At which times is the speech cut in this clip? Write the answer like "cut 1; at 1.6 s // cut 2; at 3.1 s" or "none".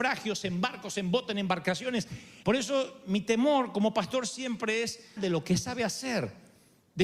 cut 1; at 2.4 s // cut 2; at 5.2 s